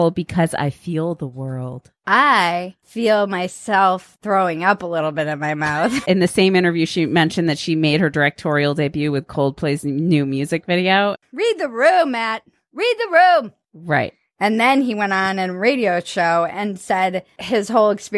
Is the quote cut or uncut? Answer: cut